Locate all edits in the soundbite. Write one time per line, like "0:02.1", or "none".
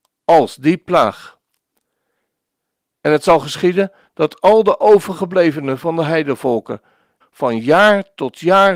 0:07.2